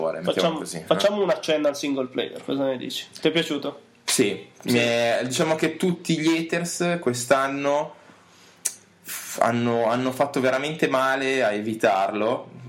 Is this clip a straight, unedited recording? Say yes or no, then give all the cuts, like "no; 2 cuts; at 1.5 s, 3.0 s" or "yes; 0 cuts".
yes; 0 cuts